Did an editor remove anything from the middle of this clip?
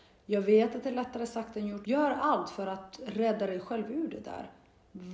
yes; 1 cut; at 1.8 s

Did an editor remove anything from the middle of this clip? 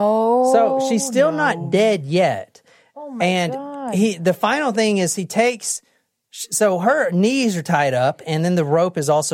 no; 0 cuts

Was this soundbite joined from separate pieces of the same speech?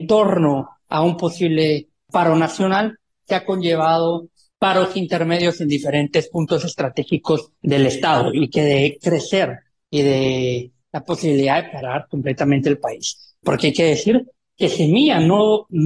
yes; 3 cuts; at 7.6 s, 10.8 s, 13.4 s

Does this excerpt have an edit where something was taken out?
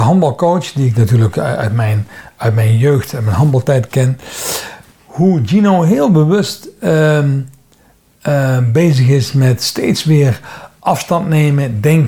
no; 0 cuts

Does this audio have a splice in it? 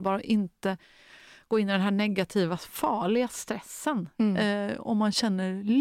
no; 0 cuts

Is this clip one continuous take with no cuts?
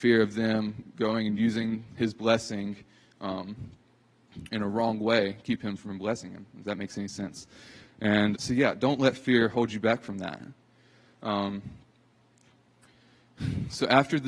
no; 1 cut; at 8.3 s

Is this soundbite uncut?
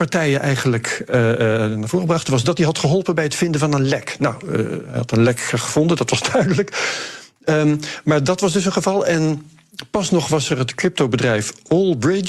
yes; 0 cuts

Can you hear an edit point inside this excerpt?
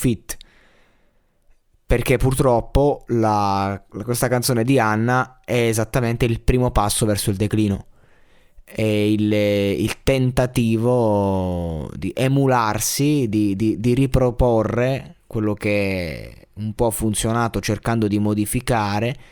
no; 0 cuts

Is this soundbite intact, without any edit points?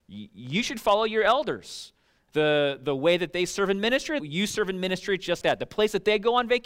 no; 3 cuts; at 2.3 s, 4.2 s, 5.4 s

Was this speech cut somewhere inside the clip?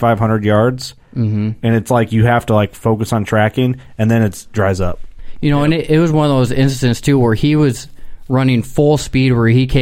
no; 0 cuts

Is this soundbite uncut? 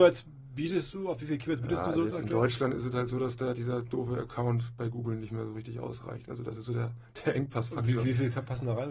yes; 0 cuts

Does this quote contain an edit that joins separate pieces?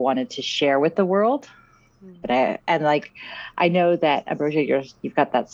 yes; 1 cut; at 2.2 s

